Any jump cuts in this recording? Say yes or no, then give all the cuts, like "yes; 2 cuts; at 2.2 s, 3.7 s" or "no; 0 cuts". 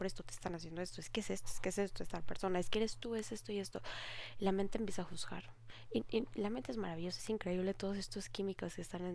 no; 0 cuts